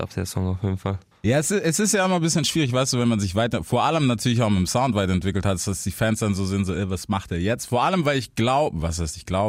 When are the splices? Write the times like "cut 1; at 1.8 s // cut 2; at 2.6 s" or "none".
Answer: none